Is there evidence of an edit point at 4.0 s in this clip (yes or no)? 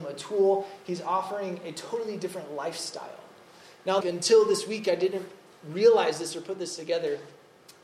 yes